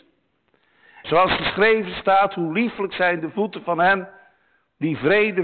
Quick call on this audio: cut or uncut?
cut